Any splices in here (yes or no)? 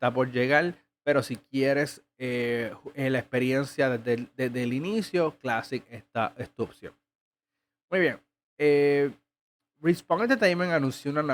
no